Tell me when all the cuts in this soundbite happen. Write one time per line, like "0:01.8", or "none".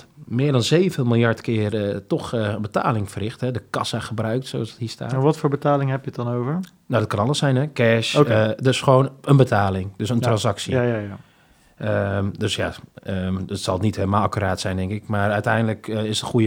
none

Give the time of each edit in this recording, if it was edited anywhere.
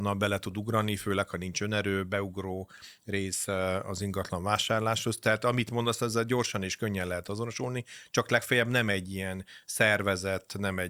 none

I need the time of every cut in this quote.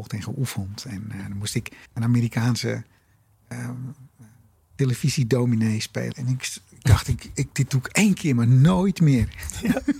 0:01.9
0:06.1

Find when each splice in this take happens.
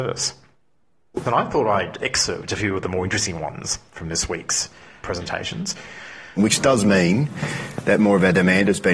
0:01.2
0:05.0
0:06.4

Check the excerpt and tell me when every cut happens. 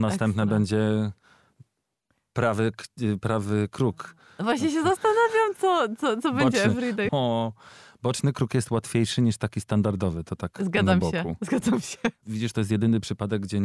0:07.1
0:12.2

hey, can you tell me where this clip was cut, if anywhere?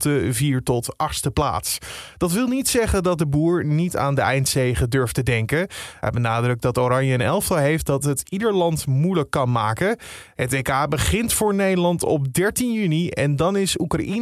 none

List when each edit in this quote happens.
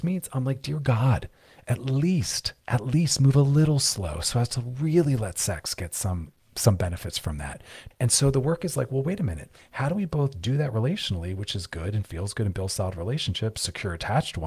0:07.9

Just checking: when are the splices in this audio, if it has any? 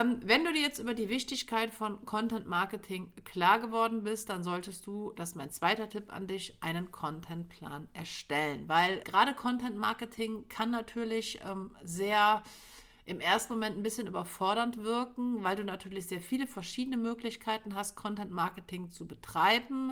0:09.0

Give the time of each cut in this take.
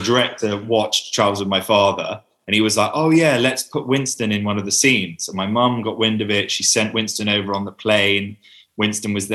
none

